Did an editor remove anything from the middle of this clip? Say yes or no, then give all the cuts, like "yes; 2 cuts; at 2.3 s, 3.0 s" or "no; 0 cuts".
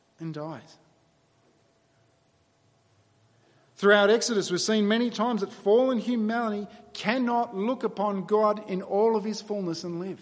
no; 0 cuts